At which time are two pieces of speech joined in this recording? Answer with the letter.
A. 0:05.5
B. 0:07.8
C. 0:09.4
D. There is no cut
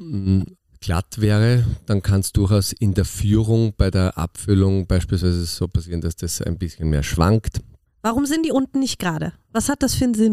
B